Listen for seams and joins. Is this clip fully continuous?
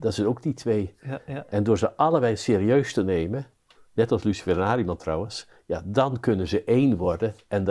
yes; 0 cuts

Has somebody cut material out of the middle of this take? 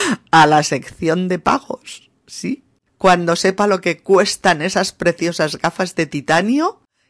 yes; 1 cut; at 2.9 s

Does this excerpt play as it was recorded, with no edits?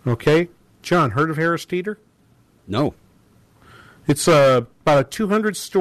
yes; 0 cuts

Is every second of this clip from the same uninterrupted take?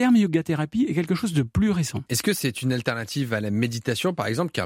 no; 1 cut; at 2.1 s

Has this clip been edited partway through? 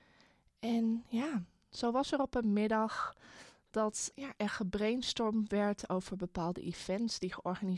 yes; 1 cut; at 4.1 s

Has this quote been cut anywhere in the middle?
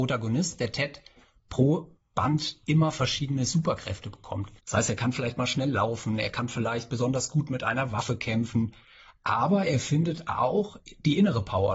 yes; 1 cut; at 4.6 s

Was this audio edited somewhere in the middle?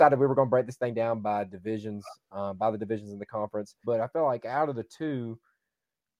yes; 1 cut; at 3.8 s

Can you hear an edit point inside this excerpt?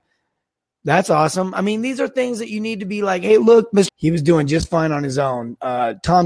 yes; 1 cut; at 3.9 s

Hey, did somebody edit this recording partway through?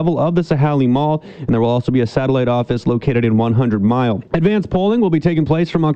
yes; 1 cut; at 4.3 s

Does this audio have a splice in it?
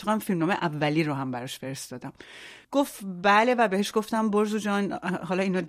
yes; 1 cut; at 2.6 s

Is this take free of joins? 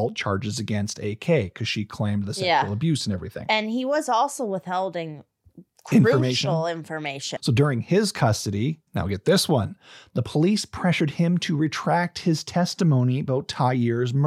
no; 2 cuts; at 7.4 s, 8.9 s

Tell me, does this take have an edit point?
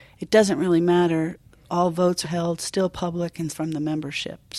yes; 2 cuts; at 2.2 s, 3.5 s

